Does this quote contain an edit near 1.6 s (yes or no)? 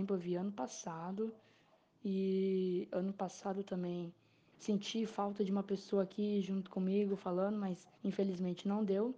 no